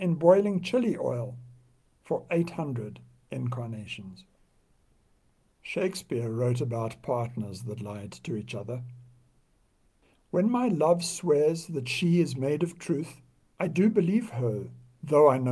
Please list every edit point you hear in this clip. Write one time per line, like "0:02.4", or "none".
none